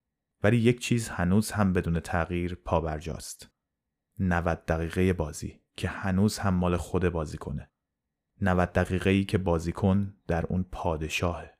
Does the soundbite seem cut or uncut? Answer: uncut